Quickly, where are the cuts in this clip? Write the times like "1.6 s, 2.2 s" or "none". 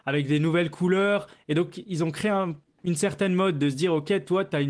none